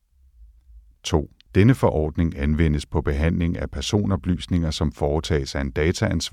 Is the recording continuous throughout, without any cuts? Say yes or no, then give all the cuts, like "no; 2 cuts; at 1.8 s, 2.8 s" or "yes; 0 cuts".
no; 1 cut; at 1.5 s